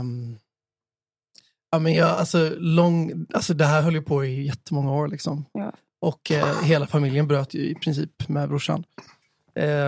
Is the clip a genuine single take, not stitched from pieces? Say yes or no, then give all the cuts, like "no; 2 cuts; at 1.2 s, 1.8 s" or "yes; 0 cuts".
yes; 0 cuts